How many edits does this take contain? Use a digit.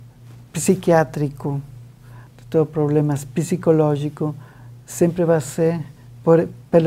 0